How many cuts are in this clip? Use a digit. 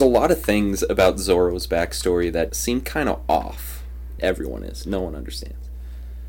2